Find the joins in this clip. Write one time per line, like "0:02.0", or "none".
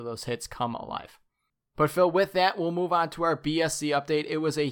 none